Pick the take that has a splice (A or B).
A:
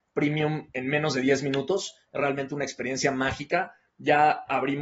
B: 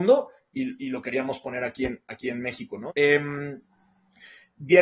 B